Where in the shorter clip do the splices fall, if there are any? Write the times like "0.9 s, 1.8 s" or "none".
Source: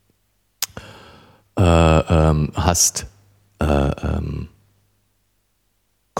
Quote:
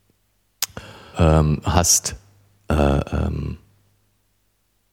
1.1 s